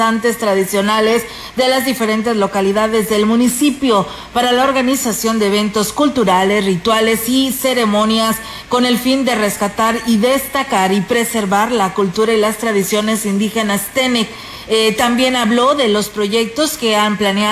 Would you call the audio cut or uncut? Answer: uncut